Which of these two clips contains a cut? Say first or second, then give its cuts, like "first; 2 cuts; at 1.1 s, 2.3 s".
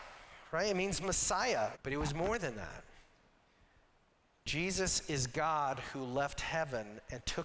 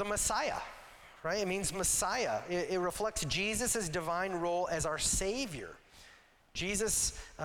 first; 1 cut; at 1.7 s